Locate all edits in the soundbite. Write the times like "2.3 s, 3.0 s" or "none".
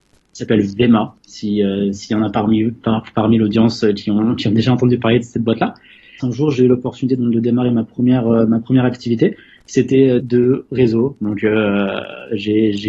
6.2 s, 10.2 s